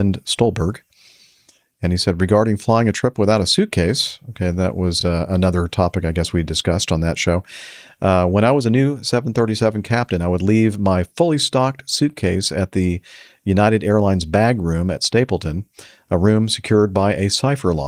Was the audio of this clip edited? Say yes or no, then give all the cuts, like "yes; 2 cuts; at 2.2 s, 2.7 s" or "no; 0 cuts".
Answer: no; 0 cuts